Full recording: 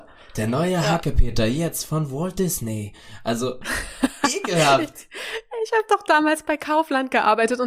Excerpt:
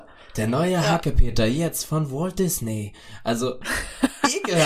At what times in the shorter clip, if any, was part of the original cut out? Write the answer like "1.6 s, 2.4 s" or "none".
none